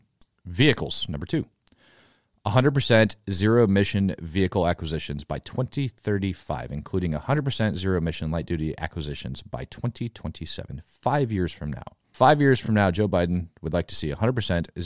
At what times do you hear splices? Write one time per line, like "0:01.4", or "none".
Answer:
none